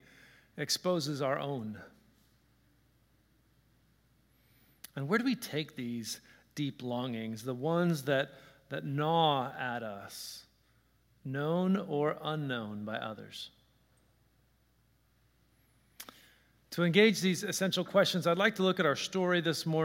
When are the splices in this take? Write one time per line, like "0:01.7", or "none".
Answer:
none

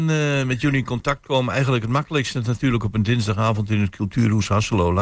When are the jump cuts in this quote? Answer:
none

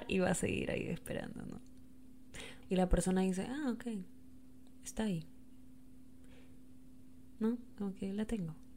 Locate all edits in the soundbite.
0:02.6

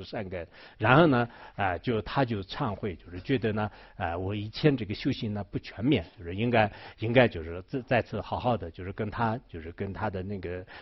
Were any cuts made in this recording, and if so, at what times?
none

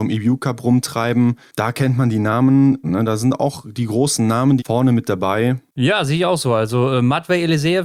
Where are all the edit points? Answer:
0:02.8
0:04.6

